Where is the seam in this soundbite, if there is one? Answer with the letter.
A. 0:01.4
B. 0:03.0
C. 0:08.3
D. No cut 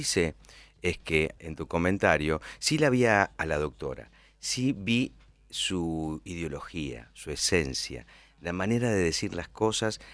A